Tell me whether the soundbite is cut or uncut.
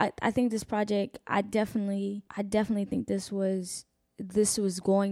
cut